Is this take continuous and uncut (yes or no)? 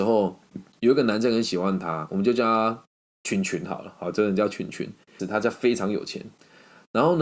no